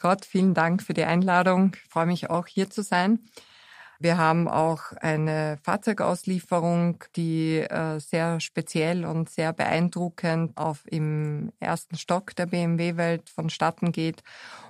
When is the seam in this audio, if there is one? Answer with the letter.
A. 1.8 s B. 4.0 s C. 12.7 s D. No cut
B